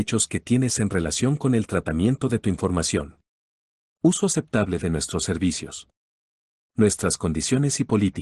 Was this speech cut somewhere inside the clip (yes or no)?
no